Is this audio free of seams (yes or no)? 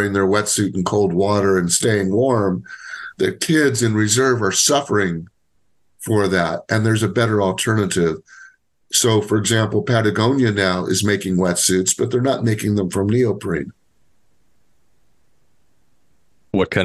yes